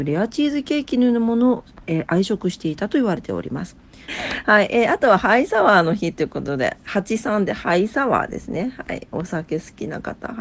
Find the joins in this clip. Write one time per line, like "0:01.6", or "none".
0:04.1